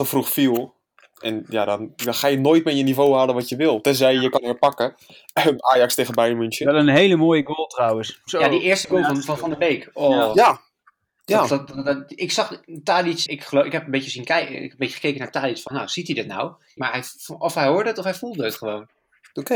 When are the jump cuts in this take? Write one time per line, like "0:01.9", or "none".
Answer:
0:13.3
0:16.8

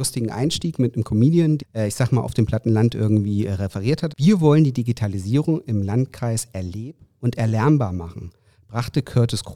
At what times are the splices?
0:01.6
0:04.1

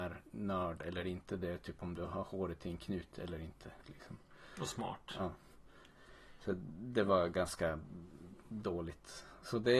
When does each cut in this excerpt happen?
0:03.8

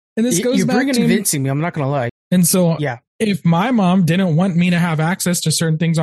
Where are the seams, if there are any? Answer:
0:01.0
0:02.1

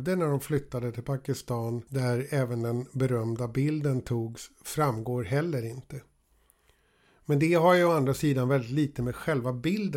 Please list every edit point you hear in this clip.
none

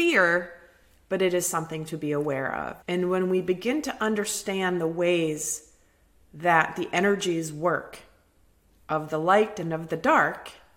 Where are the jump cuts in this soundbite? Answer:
0:02.8

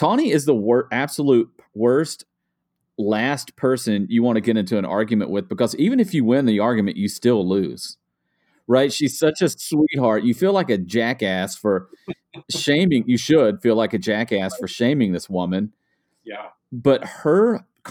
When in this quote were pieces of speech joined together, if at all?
none

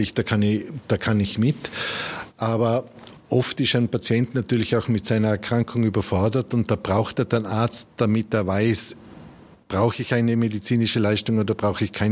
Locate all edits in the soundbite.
none

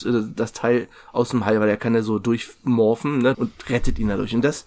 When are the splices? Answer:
0:03.3

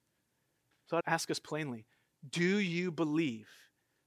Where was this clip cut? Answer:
0:01.0

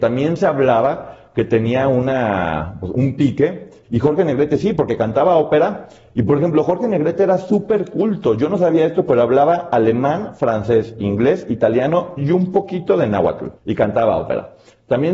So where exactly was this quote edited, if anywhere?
0:03.8
0:13.6

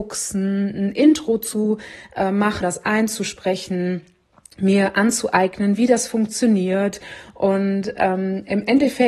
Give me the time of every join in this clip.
0:02.6

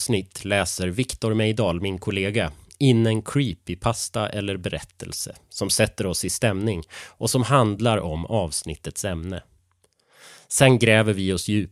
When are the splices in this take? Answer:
none

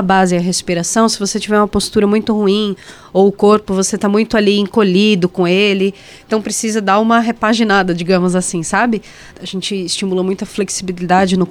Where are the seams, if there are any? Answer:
0:09.3

